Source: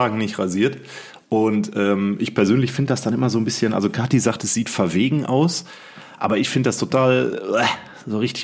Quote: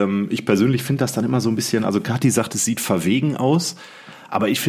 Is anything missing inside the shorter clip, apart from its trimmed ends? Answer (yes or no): no